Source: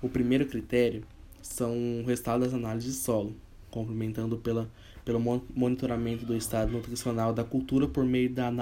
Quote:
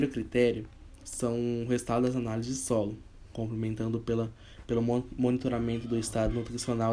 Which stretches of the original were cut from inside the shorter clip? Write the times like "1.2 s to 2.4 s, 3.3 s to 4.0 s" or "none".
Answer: none